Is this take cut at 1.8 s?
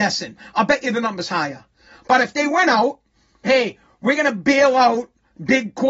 no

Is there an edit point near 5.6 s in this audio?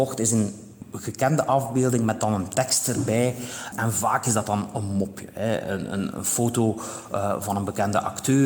no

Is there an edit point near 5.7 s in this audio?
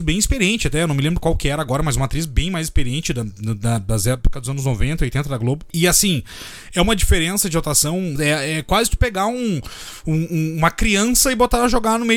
no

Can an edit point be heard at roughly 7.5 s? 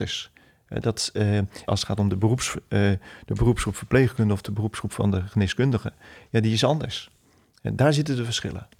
no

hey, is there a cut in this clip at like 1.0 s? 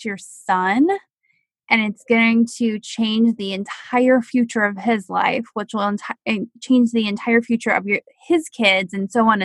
no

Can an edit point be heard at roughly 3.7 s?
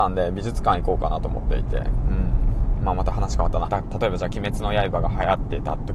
yes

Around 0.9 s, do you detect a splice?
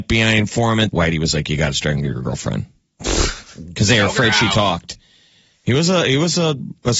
yes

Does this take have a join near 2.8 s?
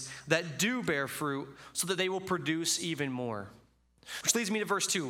no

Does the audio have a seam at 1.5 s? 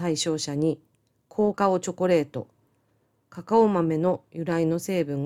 yes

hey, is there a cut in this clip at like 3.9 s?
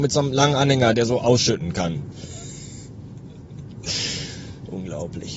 no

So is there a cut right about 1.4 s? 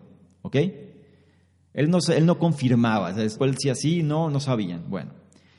no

